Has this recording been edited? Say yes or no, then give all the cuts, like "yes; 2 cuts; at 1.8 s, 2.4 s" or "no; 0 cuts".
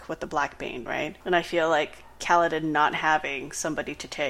yes; 1 cut; at 1.2 s